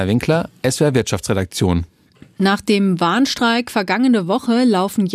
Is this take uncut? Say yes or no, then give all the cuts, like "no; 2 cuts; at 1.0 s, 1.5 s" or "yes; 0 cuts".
yes; 0 cuts